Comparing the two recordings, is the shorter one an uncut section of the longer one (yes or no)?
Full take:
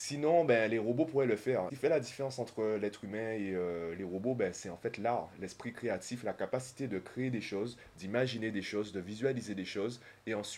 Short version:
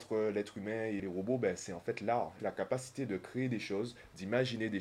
no